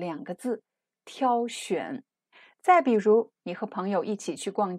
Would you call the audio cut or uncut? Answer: cut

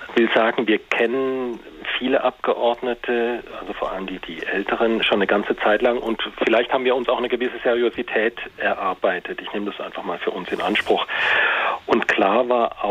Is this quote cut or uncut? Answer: uncut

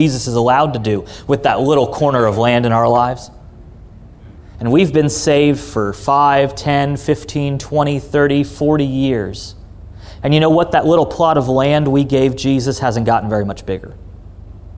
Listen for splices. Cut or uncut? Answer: cut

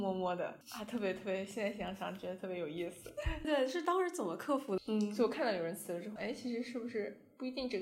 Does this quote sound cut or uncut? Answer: cut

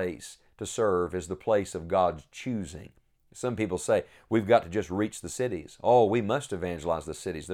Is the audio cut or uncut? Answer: uncut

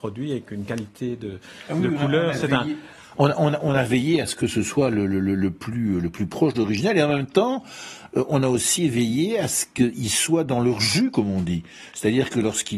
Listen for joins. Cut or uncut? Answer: uncut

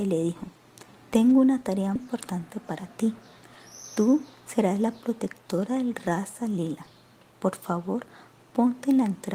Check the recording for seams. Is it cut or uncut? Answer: cut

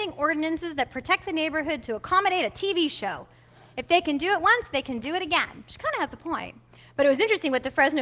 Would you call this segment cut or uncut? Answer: uncut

